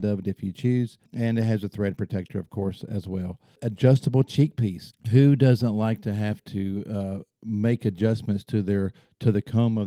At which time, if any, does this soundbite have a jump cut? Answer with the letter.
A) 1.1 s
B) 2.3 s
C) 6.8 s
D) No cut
D